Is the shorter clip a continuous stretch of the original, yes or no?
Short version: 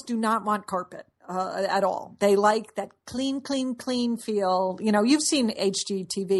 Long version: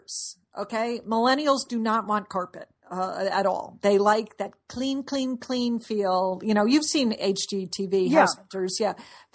yes